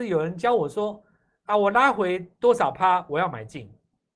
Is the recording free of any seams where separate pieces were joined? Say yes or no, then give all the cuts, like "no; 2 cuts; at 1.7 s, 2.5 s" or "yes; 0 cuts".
yes; 0 cuts